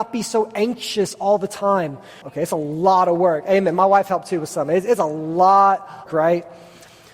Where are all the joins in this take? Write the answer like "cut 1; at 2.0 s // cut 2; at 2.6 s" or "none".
cut 1; at 2.2 s // cut 2; at 6.1 s